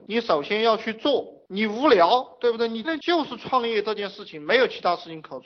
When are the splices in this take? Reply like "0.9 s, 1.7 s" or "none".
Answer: 2.8 s